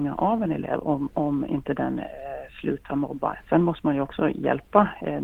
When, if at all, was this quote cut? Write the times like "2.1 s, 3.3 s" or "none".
3.4 s